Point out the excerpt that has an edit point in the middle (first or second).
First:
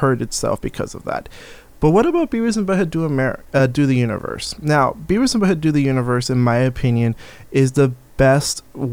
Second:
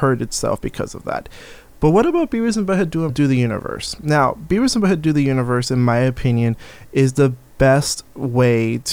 second